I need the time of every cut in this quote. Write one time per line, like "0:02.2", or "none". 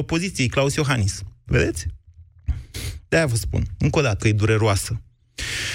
0:04.2

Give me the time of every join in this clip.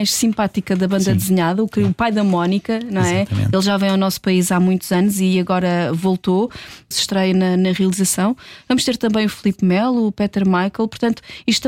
0:06.9

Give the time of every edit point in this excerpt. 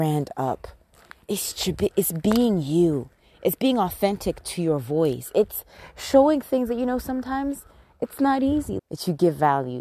0:08.8

